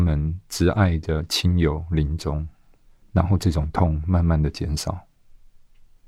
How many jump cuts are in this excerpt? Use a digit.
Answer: 1